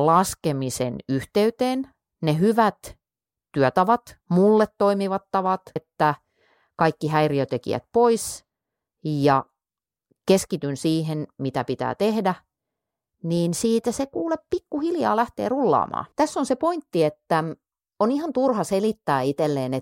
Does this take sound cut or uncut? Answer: cut